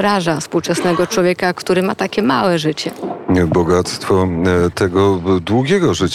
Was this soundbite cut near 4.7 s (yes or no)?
yes